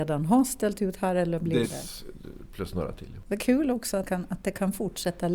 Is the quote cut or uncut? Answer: cut